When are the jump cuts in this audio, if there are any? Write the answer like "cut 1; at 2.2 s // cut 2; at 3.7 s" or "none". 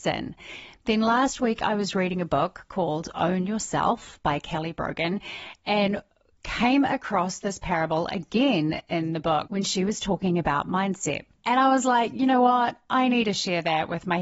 none